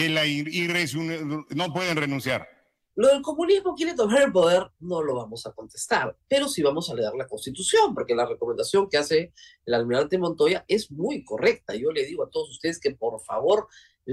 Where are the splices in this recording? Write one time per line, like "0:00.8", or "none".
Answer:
0:02.9